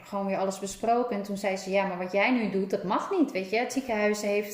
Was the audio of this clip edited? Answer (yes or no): no